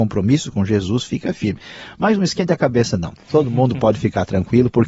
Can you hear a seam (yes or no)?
no